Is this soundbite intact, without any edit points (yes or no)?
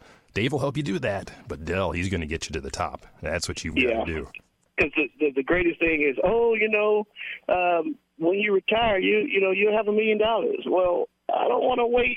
yes